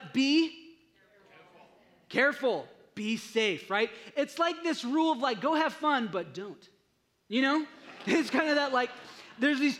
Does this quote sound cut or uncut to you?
uncut